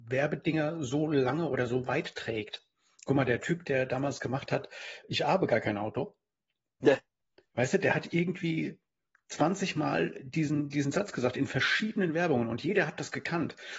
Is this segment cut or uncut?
cut